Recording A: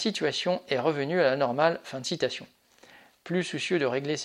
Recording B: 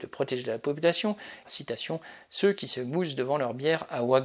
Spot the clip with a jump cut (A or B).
B